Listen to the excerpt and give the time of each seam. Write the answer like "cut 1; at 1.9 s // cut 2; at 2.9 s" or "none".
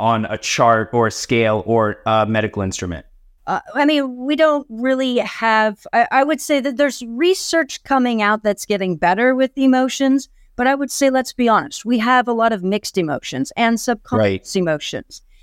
none